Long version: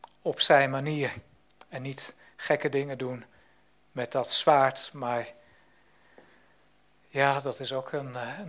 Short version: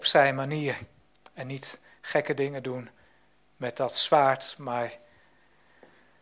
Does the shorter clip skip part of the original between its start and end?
no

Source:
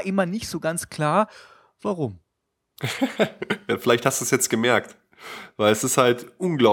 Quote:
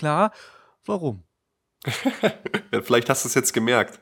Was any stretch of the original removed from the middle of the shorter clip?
no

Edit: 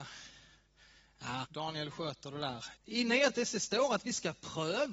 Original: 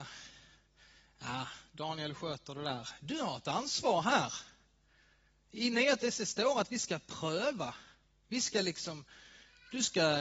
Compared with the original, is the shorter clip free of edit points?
no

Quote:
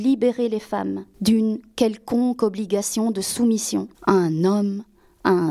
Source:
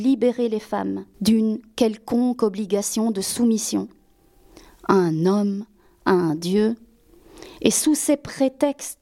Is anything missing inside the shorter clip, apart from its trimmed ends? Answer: yes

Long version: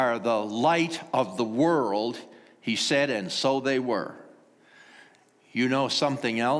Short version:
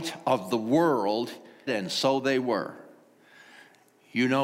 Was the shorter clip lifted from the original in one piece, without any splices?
no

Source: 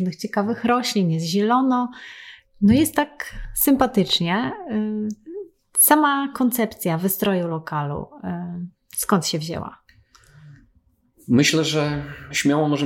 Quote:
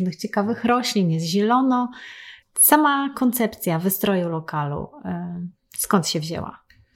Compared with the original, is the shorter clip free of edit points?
no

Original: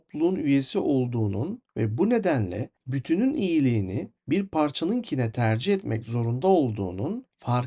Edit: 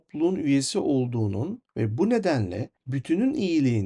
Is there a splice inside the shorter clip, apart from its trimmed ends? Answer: no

